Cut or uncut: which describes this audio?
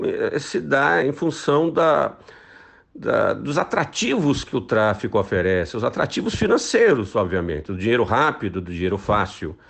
cut